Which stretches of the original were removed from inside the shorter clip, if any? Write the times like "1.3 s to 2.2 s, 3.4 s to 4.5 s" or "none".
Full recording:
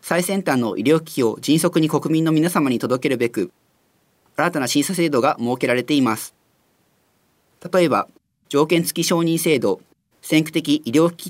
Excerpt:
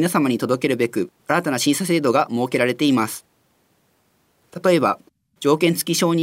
3.6 s to 4.3 s